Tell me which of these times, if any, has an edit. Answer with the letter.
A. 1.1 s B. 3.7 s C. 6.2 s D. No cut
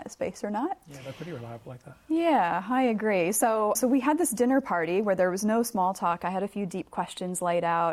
B